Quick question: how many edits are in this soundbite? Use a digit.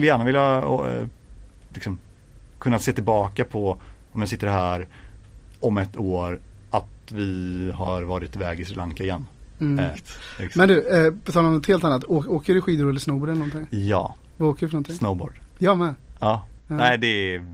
1